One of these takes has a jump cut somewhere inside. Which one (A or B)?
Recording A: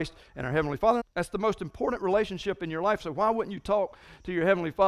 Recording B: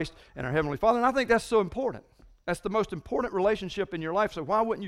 A